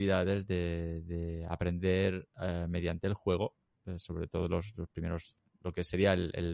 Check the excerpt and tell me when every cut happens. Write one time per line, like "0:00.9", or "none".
none